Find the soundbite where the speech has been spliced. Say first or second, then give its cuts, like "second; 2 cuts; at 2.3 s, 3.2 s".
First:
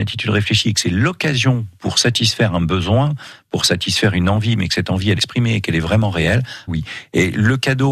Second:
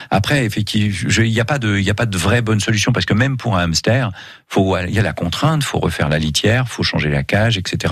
first; 2 cuts; at 5.2 s, 6.7 s